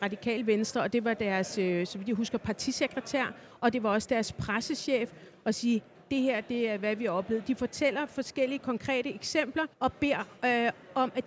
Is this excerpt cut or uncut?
cut